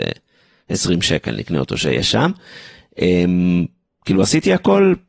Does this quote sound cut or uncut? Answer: uncut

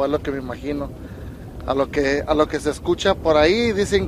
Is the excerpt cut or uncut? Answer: uncut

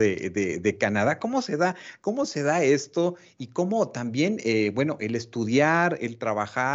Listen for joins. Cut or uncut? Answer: uncut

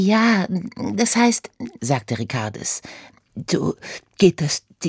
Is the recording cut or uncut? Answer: cut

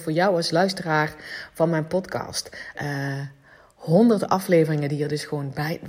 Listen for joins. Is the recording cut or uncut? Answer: cut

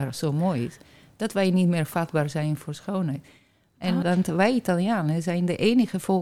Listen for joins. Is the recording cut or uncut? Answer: cut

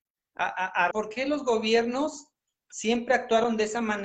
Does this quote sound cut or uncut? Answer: cut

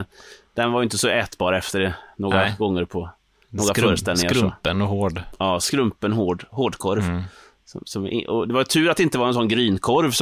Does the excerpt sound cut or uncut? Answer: uncut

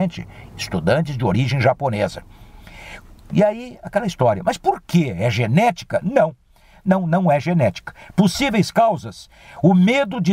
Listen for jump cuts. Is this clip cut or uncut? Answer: uncut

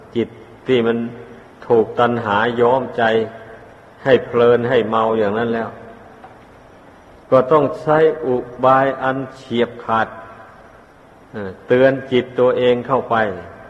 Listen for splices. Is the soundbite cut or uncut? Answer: uncut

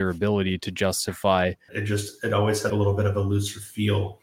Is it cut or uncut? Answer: cut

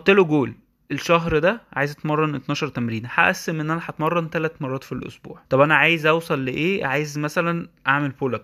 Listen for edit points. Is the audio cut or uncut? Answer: cut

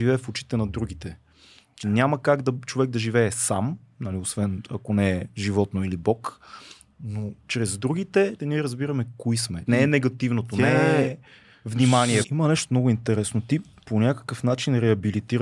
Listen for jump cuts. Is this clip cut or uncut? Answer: cut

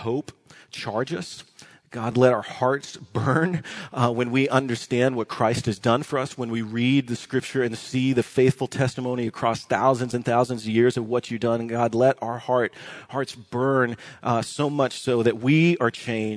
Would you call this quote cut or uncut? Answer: uncut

